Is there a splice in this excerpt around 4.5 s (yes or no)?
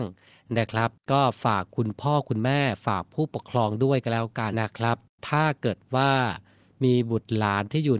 yes